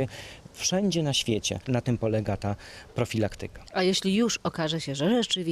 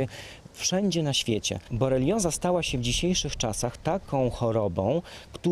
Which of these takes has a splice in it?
first; 1 cut; at 1.6 s

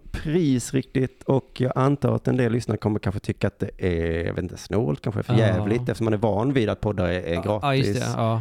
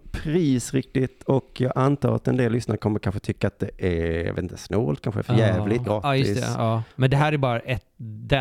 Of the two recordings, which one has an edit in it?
second; 1 cut; at 5.8 s

